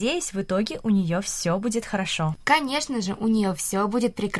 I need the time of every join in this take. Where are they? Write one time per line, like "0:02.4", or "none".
none

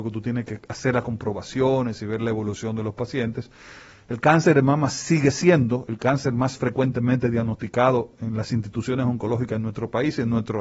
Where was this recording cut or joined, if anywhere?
0:04.0

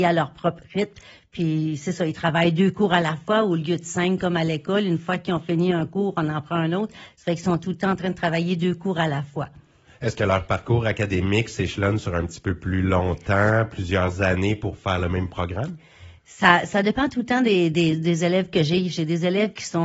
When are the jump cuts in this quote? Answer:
none

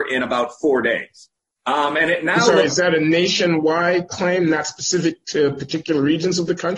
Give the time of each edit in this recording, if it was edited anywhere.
0:01.6
0:04.1

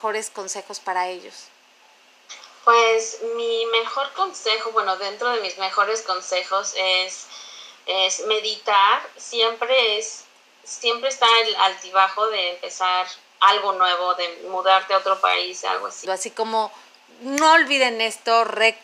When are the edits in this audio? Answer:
0:16.1

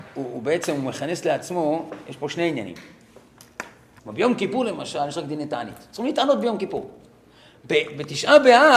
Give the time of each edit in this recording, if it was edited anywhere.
0:04.0

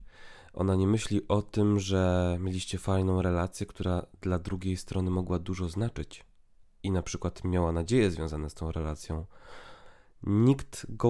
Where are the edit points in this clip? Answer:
none

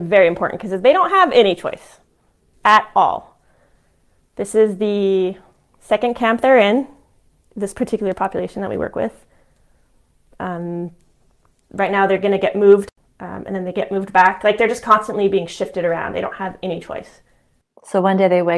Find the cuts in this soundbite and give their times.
none

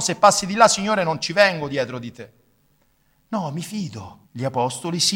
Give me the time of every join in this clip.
0:04.2

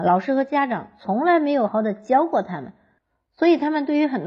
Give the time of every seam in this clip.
0:01.7

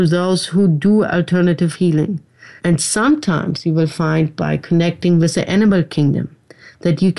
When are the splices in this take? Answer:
0:02.6

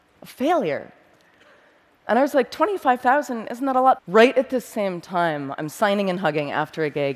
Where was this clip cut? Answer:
0:04.0

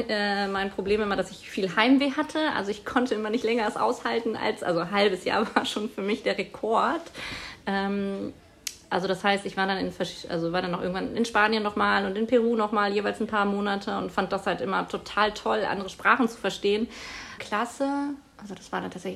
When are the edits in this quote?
0:17.4

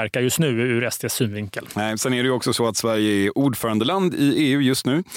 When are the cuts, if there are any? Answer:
none

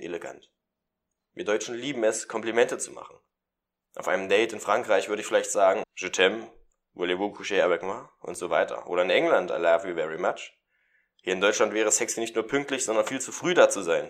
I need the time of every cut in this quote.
0:05.8

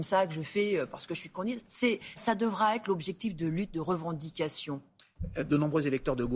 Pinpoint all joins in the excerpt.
0:02.2

